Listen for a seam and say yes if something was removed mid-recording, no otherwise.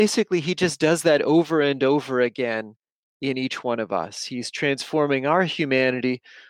no